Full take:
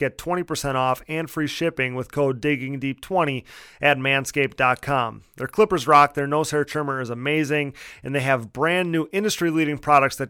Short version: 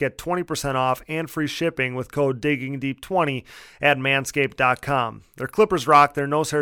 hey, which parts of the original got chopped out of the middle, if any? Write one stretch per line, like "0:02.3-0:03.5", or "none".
none